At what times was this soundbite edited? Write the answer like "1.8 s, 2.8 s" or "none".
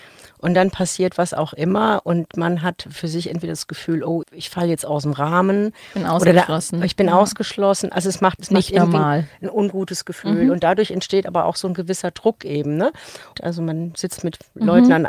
4.2 s, 8.4 s, 13.4 s